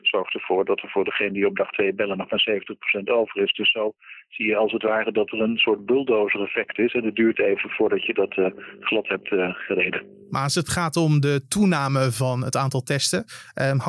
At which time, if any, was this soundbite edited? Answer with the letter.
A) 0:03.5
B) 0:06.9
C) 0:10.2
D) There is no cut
D